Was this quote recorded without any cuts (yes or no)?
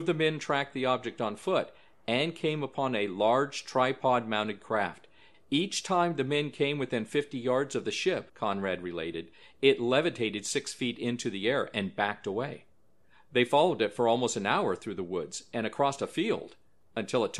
no